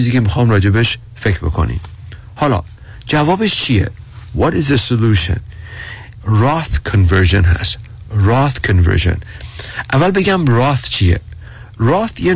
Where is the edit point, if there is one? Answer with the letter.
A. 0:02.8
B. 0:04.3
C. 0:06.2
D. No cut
C